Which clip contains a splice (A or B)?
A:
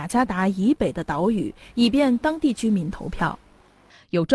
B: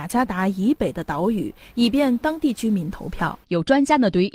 B